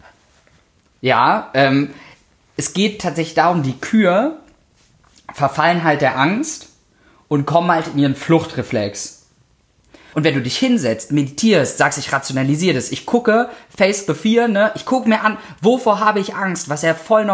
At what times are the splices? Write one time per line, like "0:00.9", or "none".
0:10.1